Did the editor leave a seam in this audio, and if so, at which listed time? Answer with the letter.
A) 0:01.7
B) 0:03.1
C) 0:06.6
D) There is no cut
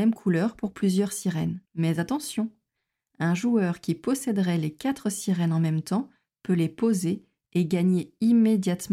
A